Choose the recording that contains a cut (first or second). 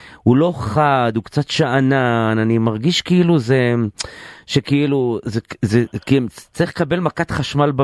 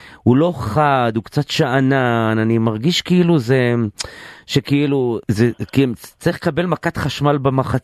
second